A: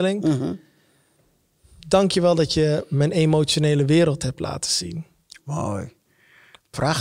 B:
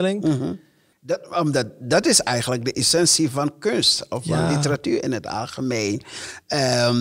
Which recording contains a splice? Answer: B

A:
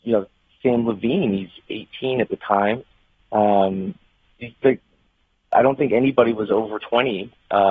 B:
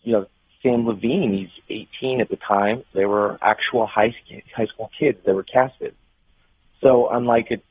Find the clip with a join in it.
B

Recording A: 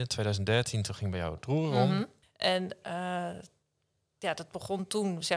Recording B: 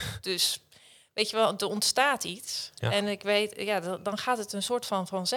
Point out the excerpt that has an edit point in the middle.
A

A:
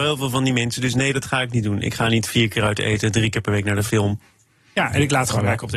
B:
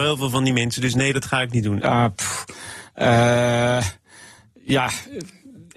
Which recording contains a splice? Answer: B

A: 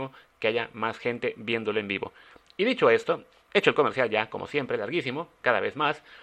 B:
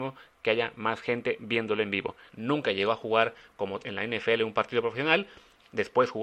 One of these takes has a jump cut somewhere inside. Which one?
B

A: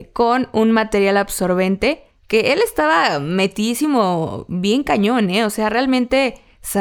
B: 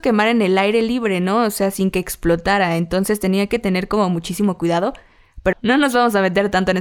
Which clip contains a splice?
B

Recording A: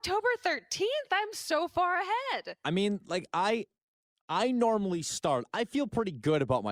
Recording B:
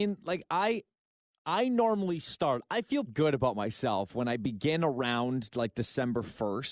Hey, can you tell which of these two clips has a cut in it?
B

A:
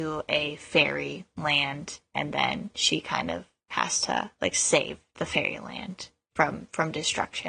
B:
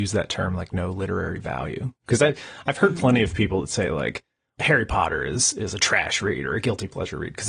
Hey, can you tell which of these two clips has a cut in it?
B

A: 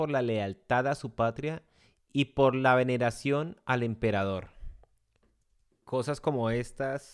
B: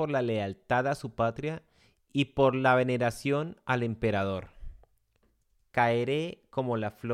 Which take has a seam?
B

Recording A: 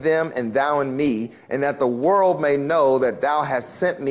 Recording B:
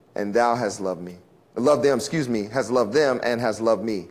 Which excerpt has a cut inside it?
A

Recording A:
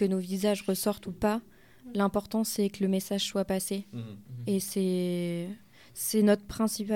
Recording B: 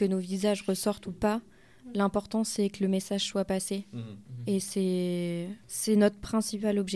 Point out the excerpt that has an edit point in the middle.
B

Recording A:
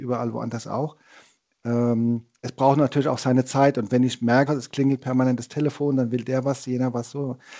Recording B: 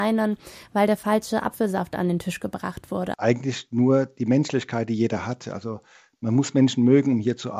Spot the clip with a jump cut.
A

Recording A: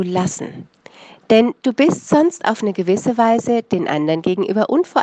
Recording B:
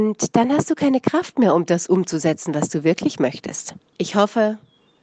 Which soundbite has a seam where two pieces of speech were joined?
B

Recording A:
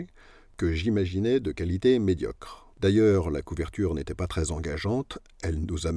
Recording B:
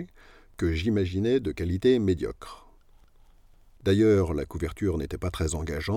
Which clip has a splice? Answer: A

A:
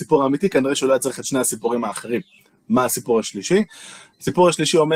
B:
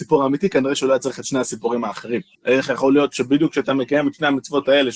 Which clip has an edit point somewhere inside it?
B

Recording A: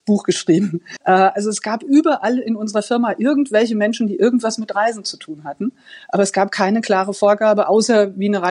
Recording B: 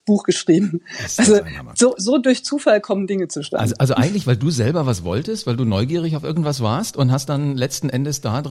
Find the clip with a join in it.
A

